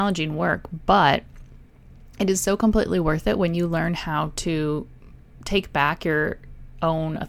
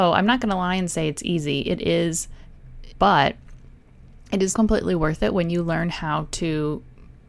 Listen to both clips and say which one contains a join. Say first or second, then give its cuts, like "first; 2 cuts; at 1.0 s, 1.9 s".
second; 2 cuts; at 2.9 s, 4.5 s